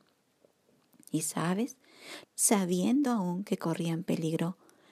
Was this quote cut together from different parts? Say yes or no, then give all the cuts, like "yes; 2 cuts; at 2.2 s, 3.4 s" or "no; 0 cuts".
yes; 1 cut; at 2.2 s